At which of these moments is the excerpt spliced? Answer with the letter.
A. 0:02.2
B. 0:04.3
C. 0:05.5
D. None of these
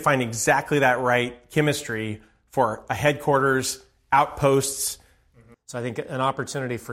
C